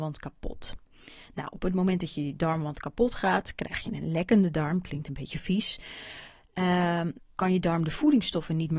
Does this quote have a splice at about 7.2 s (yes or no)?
yes